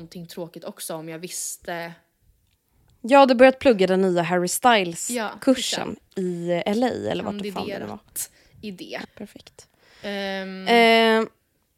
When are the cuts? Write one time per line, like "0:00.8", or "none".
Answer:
0:06.1
0:09.0